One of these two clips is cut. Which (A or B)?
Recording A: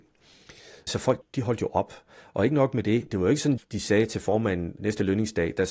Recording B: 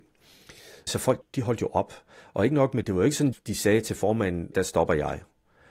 B